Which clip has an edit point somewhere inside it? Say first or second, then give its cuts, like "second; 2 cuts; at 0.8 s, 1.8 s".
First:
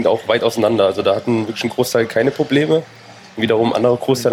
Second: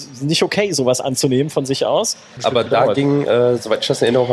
second; 1 cut; at 2.4 s